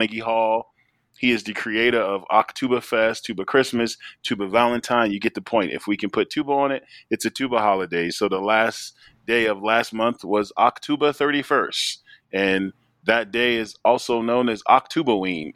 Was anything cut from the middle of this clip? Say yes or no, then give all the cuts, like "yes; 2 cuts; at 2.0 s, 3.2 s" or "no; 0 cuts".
no; 0 cuts